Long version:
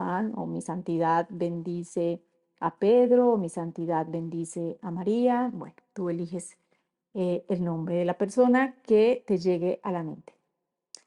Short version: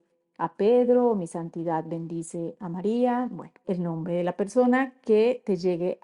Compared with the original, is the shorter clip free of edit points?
no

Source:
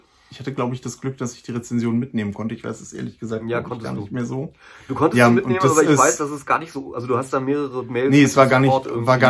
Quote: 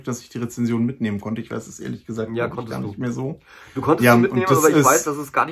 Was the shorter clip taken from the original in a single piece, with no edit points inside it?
yes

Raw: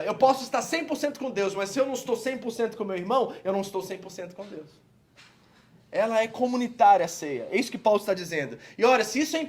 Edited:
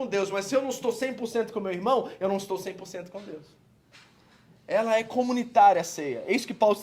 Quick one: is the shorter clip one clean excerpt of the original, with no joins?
yes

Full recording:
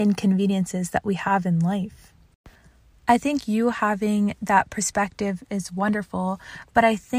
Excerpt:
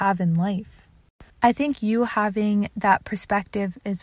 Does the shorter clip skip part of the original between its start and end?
yes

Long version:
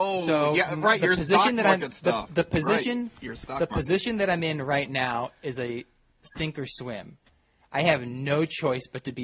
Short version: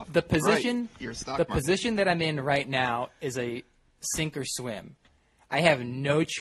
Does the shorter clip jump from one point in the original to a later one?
no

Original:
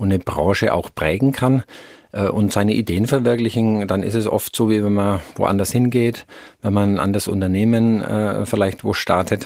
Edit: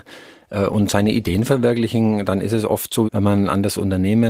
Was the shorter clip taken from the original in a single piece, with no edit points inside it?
no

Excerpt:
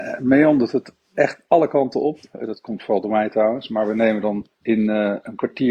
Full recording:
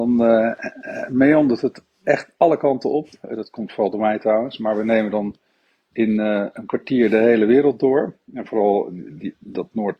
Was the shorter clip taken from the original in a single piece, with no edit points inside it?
no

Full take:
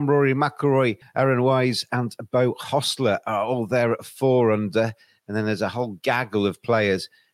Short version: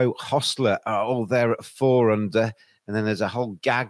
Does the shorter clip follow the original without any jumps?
yes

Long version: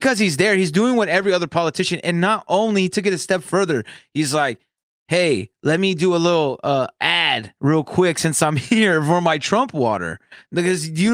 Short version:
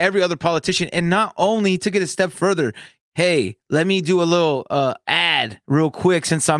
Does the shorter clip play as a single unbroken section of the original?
no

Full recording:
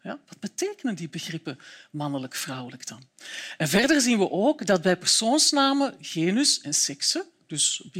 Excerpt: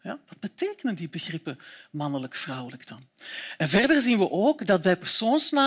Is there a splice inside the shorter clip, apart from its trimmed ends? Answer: no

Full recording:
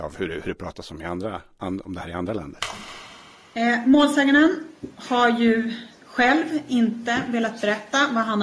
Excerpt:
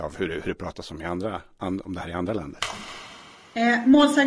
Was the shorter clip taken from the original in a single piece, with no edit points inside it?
yes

